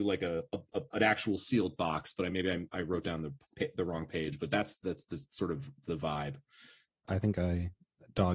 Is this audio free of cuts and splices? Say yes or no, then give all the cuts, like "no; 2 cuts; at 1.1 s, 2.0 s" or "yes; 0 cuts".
no; 1 cut; at 7.0 s